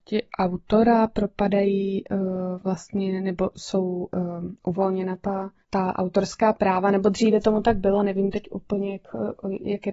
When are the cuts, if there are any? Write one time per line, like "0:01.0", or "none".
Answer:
none